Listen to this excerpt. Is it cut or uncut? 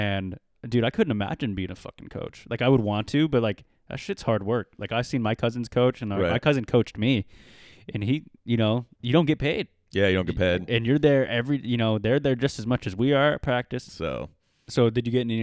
cut